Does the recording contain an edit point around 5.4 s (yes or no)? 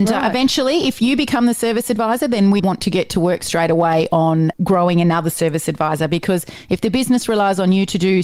no